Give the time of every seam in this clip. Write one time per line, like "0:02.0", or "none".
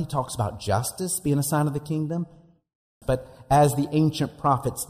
0:03.0